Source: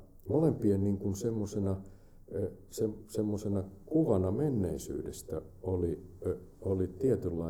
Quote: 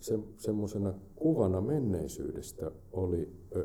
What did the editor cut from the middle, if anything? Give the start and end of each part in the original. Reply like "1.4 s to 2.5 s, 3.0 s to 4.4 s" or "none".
none